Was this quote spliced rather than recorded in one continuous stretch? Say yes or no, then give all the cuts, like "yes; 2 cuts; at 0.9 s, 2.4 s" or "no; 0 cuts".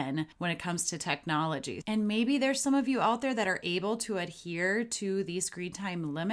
yes; 1 cut; at 1.8 s